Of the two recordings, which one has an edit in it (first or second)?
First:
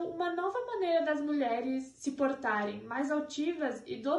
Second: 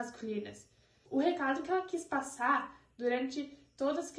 second